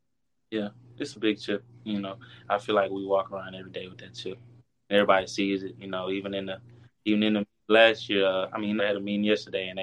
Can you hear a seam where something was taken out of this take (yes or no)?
yes